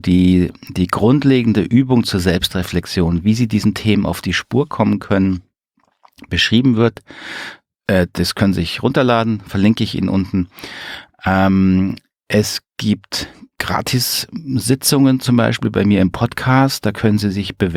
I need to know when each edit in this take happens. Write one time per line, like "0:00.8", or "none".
0:13.5